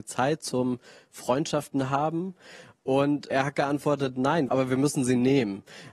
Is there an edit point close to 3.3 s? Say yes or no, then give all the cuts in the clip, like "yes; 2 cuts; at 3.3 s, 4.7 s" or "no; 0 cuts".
yes; 2 cuts; at 3.3 s, 4.5 s